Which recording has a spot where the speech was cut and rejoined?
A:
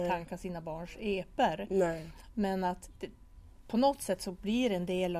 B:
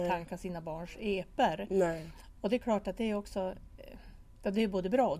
A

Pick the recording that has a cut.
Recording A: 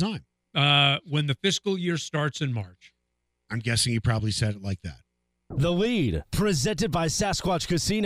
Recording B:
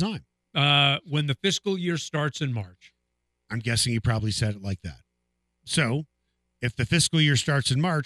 A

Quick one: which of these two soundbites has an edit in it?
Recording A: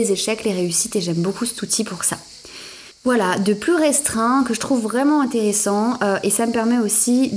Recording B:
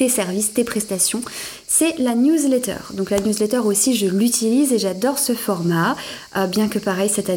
A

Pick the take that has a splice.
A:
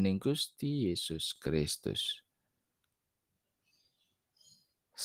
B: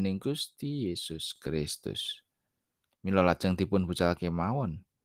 B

